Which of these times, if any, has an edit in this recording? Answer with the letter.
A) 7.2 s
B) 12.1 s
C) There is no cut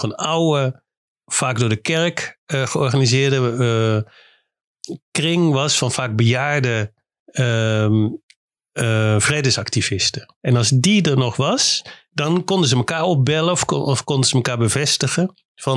A